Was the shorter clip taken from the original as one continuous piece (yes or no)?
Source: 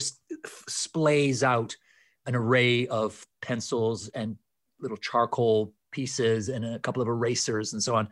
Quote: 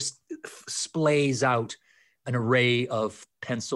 yes